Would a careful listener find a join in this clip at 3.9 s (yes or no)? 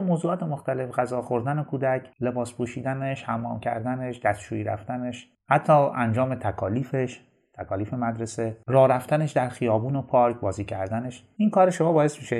no